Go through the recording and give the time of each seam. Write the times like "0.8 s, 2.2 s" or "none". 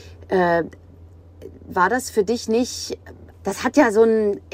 3.3 s